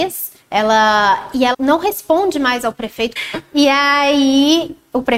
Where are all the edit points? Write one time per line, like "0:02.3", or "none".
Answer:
0:01.5
0:03.2